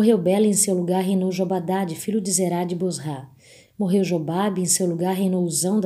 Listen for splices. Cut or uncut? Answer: uncut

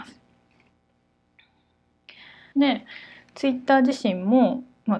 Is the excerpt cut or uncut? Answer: cut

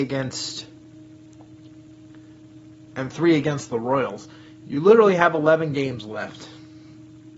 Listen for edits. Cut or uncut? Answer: uncut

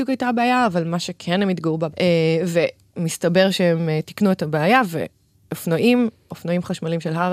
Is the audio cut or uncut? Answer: cut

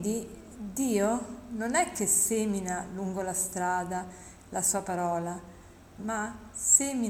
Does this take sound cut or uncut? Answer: cut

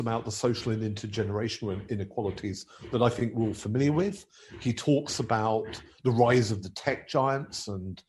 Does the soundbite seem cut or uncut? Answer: uncut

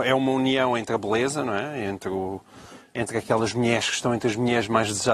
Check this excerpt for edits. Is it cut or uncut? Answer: uncut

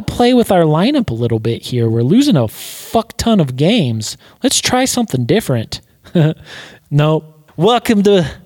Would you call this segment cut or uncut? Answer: cut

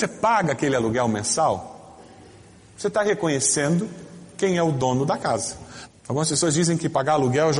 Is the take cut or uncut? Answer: cut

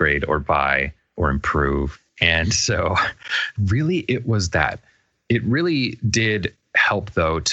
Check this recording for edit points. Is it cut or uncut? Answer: uncut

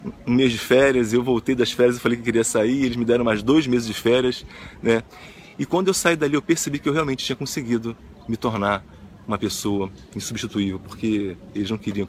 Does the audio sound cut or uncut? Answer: uncut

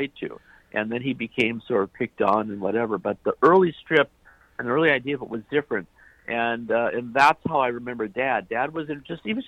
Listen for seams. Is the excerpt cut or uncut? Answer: uncut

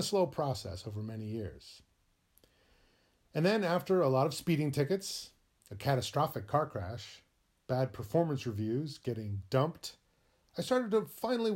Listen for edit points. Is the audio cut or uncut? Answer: uncut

